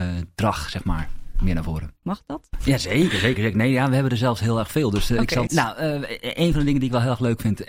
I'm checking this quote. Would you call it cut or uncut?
cut